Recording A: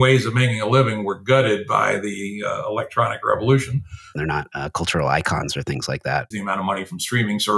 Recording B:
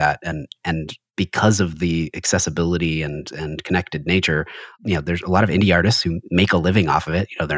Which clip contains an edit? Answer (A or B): A